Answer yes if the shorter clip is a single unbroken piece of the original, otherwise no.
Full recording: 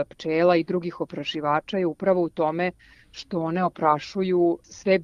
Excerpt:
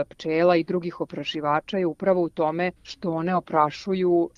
no